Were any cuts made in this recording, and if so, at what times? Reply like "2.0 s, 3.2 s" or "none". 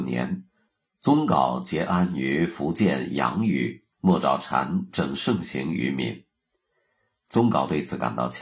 3.9 s